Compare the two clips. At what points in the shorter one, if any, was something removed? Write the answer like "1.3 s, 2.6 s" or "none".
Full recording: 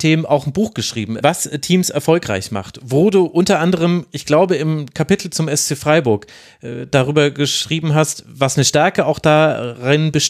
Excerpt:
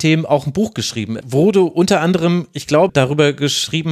1.2 s, 2.9 s